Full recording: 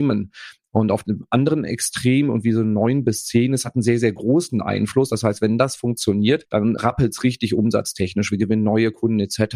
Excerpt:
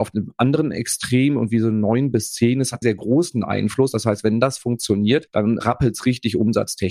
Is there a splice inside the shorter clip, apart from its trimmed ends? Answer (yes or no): yes